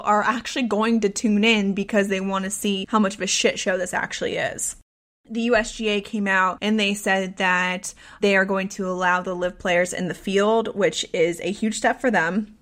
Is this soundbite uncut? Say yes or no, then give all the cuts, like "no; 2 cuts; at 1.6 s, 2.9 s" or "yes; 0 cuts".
no; 1 cut; at 8.2 s